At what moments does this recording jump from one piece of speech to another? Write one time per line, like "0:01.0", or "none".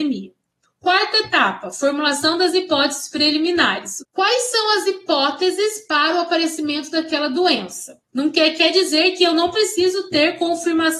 0:04.0
0:08.0